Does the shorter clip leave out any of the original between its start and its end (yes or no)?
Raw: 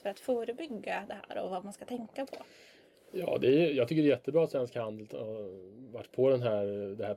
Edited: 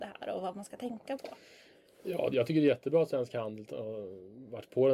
yes